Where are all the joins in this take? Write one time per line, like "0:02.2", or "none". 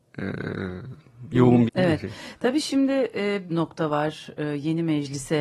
0:01.7
0:03.5